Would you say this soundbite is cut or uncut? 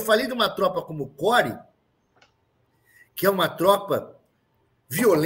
uncut